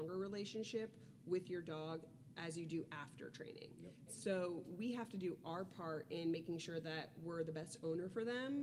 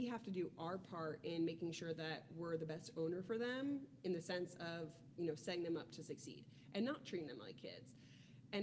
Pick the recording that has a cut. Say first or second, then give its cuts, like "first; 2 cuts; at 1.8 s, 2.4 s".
first; 1 cut; at 4.1 s